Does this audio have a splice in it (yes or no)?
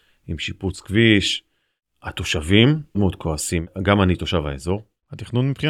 yes